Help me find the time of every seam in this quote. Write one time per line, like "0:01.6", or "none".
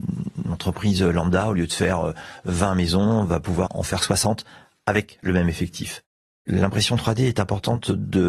0:03.7